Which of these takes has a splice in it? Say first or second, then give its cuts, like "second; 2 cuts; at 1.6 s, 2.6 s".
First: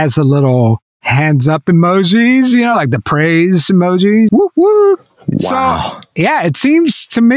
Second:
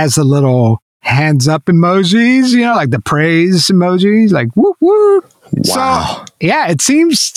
first; 1 cut; at 4.3 s